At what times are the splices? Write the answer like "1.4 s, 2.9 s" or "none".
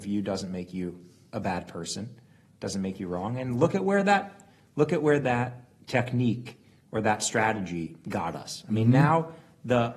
none